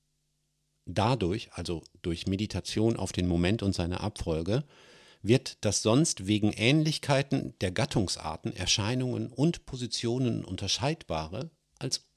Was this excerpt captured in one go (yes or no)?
yes